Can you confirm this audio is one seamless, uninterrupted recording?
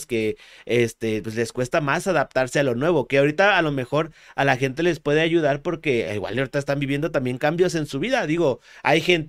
yes; 0 cuts

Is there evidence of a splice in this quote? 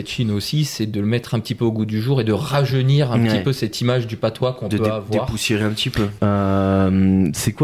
yes; 1 cut; at 6.2 s

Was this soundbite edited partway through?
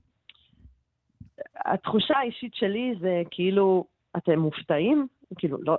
no; 0 cuts

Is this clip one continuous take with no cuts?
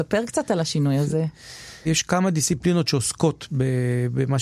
no; 1 cut; at 1.9 s

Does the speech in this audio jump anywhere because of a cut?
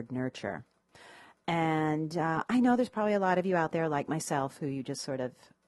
no; 0 cuts

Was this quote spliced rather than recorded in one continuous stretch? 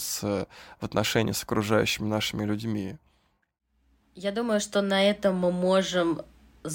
no; 0 cuts

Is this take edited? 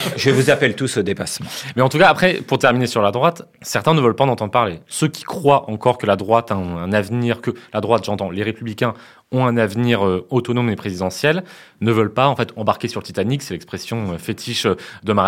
no; 0 cuts

